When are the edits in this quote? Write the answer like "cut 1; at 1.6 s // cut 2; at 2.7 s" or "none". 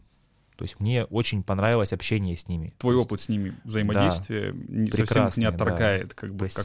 none